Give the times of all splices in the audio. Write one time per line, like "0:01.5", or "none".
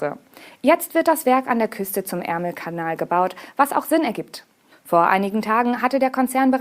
0:04.7